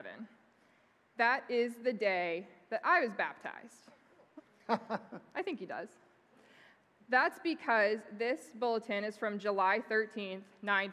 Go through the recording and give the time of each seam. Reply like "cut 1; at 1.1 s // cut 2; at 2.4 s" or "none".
cut 1; at 4.4 s // cut 2; at 7.0 s